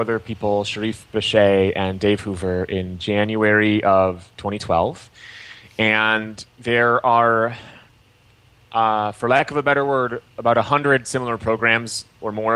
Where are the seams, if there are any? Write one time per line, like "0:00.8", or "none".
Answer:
none